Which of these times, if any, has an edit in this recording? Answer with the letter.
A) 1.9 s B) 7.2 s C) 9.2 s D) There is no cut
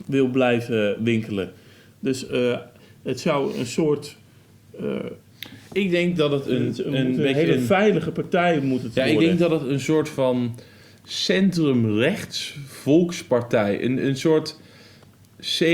D